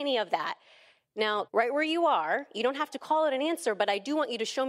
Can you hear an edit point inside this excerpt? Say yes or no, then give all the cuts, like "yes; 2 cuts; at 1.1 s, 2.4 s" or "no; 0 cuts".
yes; 1 cut; at 1.4 s